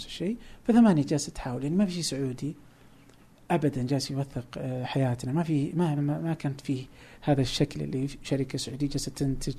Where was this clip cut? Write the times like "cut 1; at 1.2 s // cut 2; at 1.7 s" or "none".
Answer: cut 1; at 6.0 s

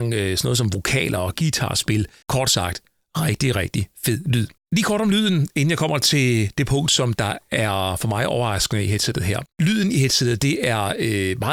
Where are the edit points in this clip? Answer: cut 1; at 2.2 s // cut 2; at 4.6 s // cut 3; at 9.5 s

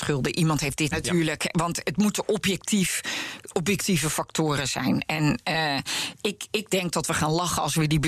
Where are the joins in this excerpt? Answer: cut 1; at 0.9 s

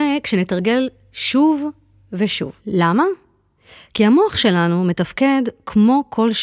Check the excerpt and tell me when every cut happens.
cut 1; at 2.6 s

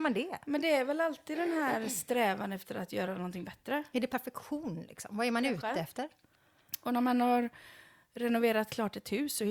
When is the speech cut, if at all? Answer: none

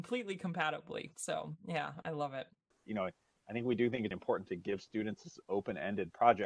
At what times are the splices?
cut 1; at 2.7 s // cut 2; at 4.1 s

